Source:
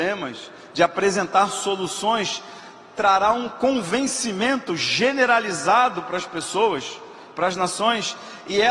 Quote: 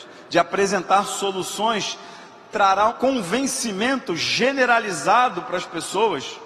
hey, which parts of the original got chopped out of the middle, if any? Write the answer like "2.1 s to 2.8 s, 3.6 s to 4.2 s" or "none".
3.3 s to 3.5 s